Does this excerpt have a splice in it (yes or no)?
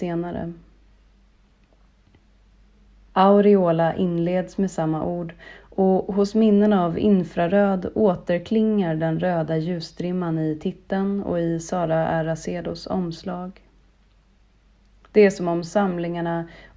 yes